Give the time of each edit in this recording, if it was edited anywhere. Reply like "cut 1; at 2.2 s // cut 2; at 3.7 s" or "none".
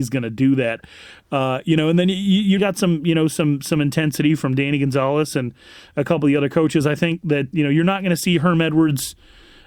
cut 1; at 2.6 s // cut 2; at 7.5 s